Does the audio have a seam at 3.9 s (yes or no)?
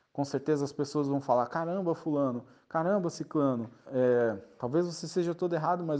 yes